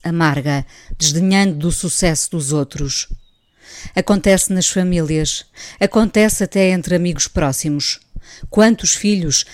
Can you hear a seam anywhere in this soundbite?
no; 0 cuts

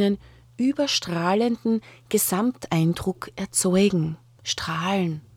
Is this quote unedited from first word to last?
no; 1 cut; at 4.4 s

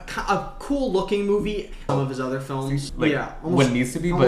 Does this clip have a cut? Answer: yes; 2 cuts; at 1.9 s, 2.9 s

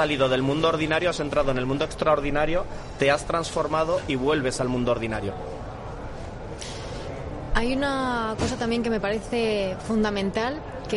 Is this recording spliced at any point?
no; 0 cuts

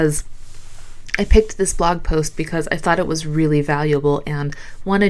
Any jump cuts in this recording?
no; 0 cuts

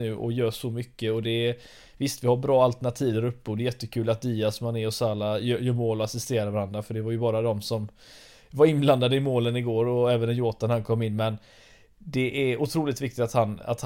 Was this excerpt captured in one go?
yes; 0 cuts

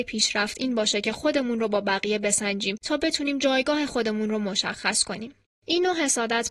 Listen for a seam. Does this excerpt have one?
yes; 1 cut; at 5.6 s

